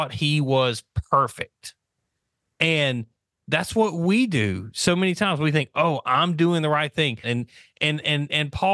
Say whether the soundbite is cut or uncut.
cut